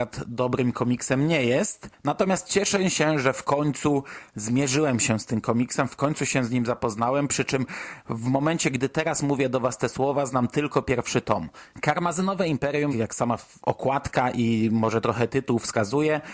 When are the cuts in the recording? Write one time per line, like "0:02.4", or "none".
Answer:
0:11.7
0:12.9